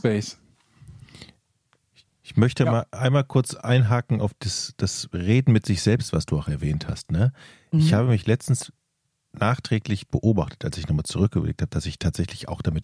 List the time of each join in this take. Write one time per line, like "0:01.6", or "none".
none